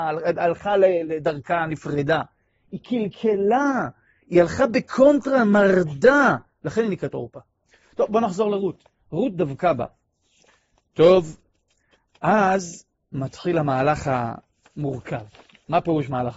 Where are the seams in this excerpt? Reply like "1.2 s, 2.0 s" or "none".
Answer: none